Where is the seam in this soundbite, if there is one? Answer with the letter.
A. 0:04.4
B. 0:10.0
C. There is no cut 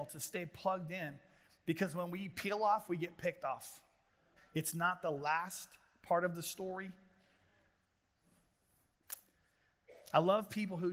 A